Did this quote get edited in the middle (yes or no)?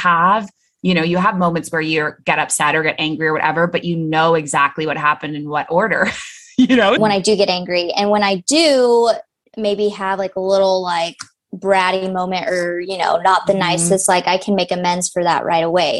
yes